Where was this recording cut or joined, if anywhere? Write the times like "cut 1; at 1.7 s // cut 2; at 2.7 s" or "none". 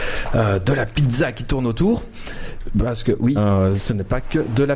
cut 1; at 3.4 s